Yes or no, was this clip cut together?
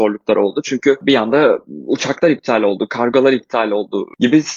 no